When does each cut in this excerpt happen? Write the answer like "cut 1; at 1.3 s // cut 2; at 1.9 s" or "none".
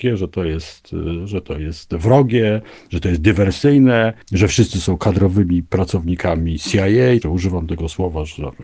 cut 1; at 4.2 s // cut 2; at 7.2 s